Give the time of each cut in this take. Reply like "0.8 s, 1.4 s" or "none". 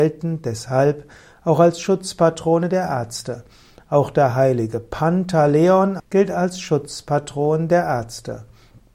6.0 s